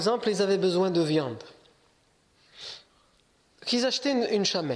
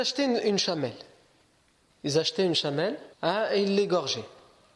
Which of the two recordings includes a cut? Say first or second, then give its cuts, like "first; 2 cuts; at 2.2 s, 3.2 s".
second; 1 cut; at 3.1 s